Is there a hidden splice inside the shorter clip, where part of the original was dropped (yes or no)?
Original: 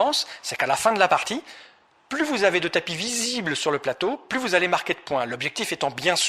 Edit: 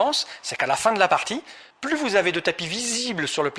yes